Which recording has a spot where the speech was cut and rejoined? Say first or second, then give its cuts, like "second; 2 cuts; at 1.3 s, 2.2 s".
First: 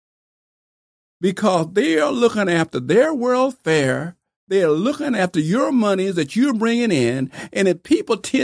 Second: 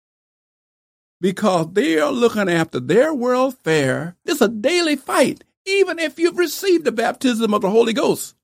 second; 1 cut; at 4.3 s